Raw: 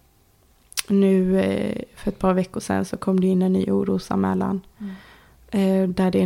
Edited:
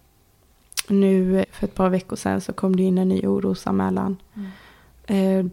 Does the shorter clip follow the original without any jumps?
no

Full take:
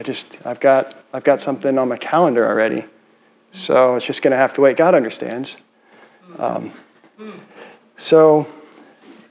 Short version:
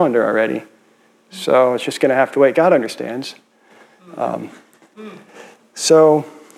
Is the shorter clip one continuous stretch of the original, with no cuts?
yes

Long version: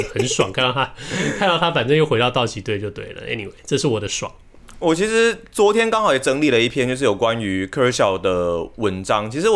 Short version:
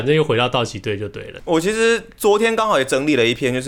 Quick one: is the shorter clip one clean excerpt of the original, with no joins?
no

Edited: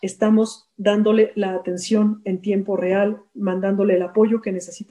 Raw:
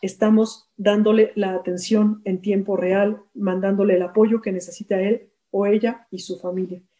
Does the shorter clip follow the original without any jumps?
yes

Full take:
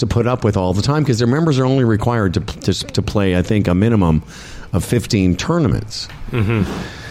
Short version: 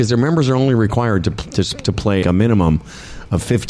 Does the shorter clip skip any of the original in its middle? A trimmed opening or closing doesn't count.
yes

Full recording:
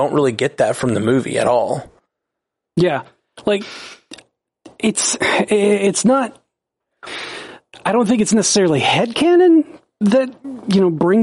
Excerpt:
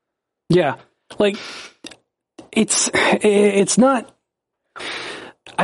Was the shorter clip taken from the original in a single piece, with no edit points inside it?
yes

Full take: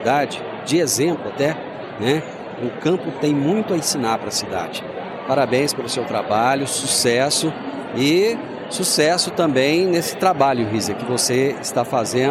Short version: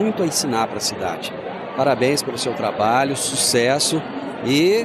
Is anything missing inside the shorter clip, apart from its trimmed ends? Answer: no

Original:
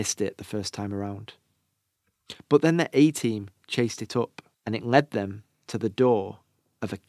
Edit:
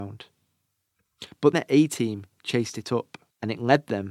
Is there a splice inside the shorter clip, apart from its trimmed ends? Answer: yes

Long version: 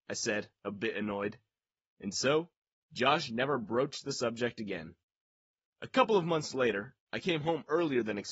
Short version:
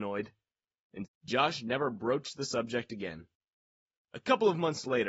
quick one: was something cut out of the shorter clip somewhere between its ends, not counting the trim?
yes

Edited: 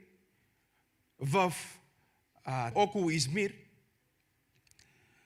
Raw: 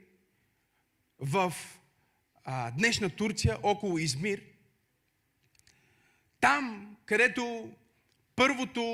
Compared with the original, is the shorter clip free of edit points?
no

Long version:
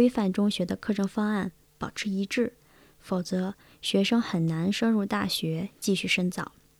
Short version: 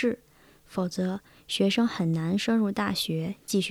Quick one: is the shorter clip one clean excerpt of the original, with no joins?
yes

